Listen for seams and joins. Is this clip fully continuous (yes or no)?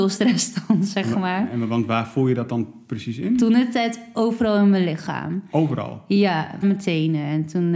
no